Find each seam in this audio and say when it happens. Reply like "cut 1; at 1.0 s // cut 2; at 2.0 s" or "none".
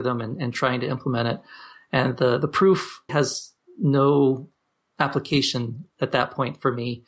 cut 1; at 3.1 s